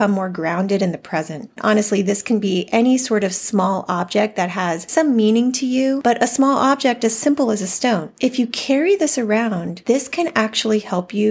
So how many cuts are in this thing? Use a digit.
1